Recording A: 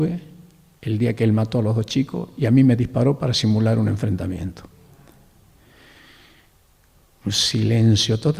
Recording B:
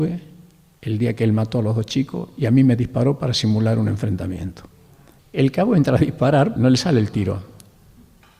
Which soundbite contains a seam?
B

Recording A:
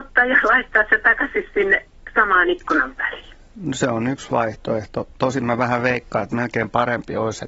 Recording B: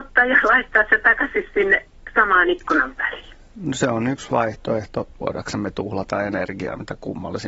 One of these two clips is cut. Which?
B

